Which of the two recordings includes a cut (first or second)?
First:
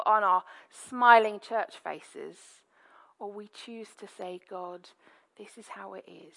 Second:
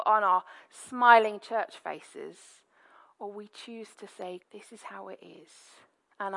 second